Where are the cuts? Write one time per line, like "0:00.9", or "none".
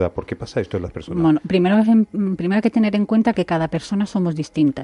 none